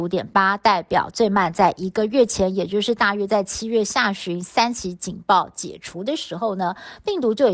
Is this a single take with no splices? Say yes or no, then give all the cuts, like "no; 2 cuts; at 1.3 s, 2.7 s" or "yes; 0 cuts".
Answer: yes; 0 cuts